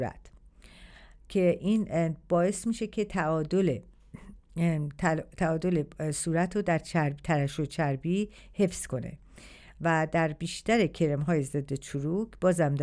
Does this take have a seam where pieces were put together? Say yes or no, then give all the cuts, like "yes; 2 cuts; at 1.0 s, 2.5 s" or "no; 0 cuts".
no; 0 cuts